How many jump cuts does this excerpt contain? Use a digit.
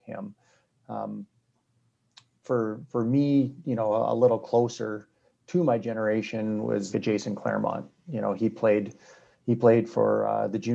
1